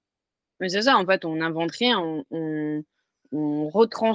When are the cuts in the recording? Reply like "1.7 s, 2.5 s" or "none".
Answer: none